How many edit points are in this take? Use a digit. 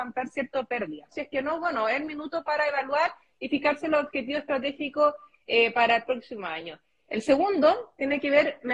2